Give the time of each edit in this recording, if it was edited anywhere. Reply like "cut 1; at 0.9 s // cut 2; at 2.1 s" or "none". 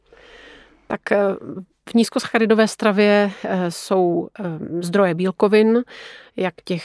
none